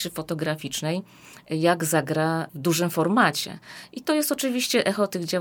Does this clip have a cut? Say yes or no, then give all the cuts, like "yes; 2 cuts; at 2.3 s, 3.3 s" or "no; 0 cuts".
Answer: no; 0 cuts